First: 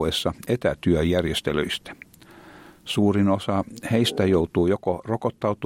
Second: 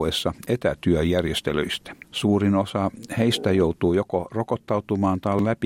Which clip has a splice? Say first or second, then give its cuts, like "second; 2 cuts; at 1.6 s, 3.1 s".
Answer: second; 1 cut; at 2.0 s